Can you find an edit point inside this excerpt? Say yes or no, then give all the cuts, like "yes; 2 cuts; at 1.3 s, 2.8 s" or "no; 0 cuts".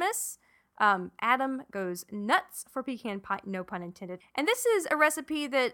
yes; 1 cut; at 4.2 s